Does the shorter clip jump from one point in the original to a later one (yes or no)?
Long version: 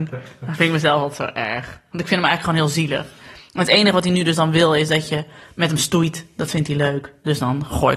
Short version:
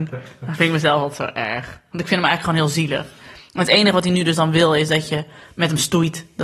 no